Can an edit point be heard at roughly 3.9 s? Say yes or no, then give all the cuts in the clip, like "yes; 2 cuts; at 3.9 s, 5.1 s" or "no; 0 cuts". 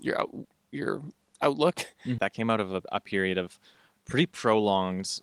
no; 1 cut; at 2.2 s